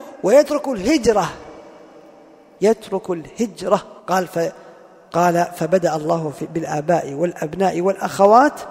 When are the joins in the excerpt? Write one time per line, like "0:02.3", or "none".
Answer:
0:04.0